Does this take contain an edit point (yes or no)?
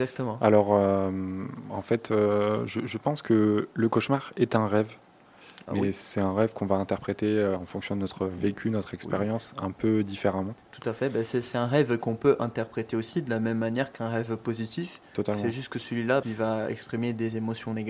yes